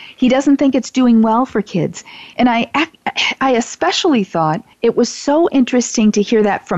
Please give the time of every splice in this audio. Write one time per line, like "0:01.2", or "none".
0:02.3
0:04.7